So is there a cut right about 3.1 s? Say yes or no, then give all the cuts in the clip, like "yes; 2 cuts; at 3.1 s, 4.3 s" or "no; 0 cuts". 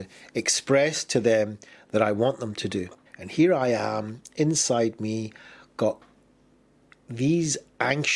yes; 1 cut; at 3.1 s